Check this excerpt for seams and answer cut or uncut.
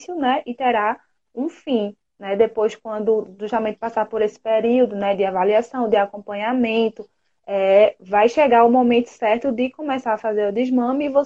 uncut